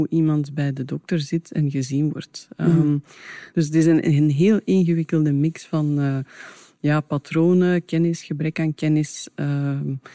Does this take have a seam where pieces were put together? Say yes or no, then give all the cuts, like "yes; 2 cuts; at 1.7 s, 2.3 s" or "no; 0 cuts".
no; 0 cuts